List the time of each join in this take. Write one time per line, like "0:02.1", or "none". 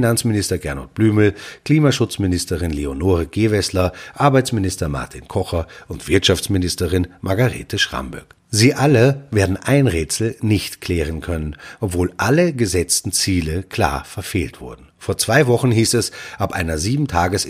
0:11.8